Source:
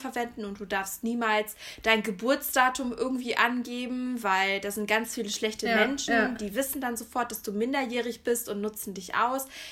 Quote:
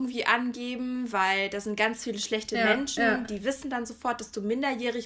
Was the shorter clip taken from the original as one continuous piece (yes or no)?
yes